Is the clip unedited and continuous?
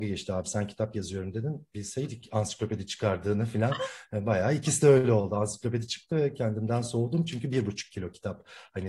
yes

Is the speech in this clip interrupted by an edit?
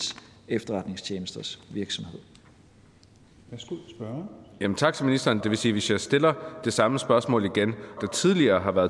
yes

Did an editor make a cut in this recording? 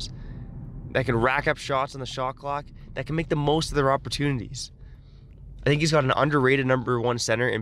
no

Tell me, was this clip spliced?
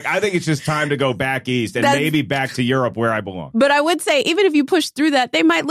no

